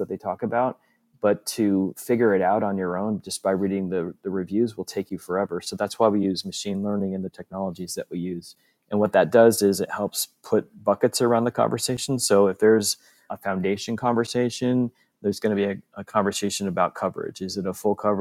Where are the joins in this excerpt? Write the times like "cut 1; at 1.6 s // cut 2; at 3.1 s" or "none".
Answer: cut 1; at 13.3 s